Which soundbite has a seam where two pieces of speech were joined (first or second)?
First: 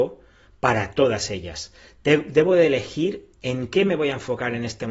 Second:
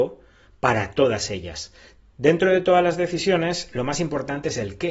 second